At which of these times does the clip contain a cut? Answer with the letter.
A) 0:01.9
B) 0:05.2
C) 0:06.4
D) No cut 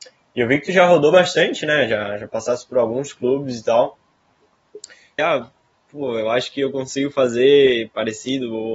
B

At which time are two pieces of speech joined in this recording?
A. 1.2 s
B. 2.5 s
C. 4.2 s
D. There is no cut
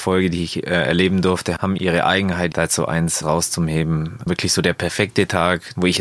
B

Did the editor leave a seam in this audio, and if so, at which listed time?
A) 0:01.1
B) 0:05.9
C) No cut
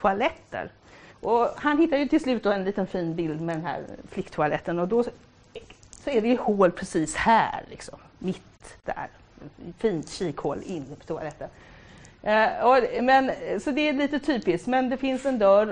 A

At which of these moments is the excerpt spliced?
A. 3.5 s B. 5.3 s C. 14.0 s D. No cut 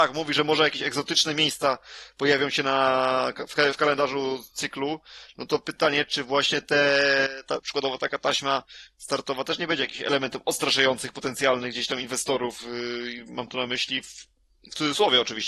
D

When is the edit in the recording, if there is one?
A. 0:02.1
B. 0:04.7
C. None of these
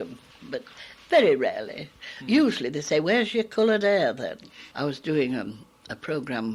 B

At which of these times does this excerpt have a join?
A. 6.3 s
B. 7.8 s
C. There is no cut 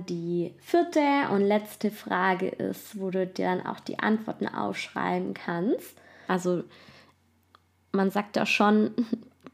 A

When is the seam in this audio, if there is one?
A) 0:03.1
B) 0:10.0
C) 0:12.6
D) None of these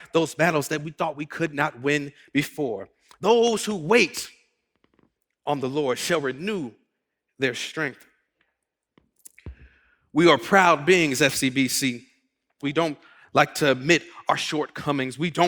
C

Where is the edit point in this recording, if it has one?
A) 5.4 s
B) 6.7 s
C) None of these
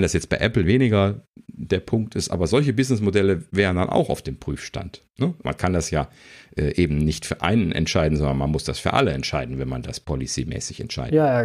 A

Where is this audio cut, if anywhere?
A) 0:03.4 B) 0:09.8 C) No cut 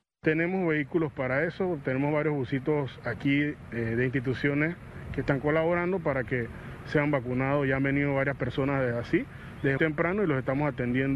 B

